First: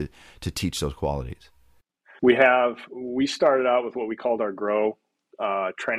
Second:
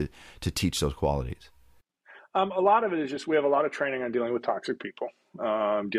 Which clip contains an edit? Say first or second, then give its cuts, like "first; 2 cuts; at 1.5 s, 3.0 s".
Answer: first; 1 cut; at 2.2 s